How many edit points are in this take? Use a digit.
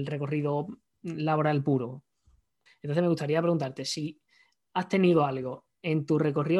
1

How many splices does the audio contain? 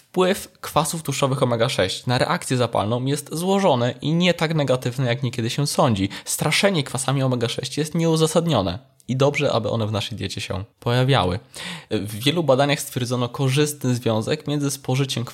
2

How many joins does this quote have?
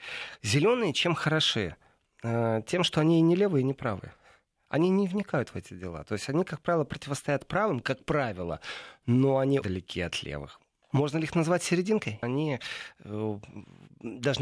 2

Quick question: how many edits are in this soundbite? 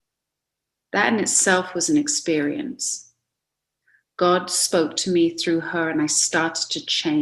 0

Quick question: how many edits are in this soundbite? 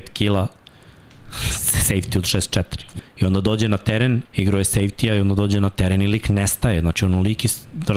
2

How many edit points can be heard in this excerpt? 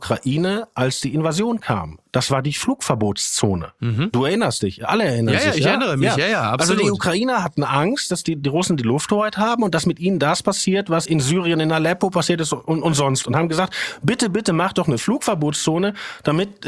2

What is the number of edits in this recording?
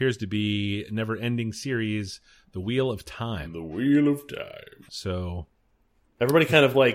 1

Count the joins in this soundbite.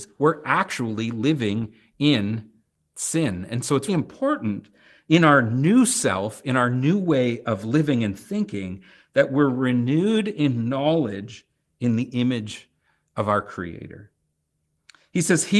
1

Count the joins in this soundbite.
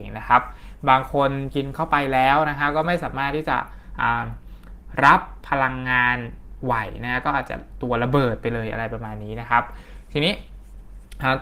0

